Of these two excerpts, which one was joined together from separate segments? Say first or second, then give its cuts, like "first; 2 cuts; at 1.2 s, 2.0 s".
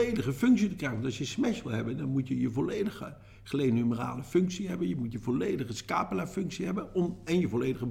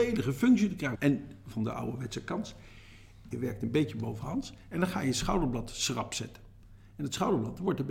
second; 2 cuts; at 1.0 s, 3.3 s